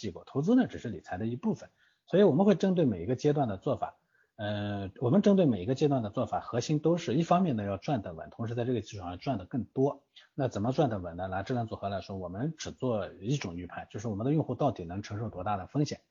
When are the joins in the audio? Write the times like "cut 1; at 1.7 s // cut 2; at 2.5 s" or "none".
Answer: none